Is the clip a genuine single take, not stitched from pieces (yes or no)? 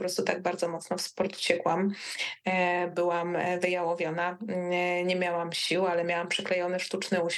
yes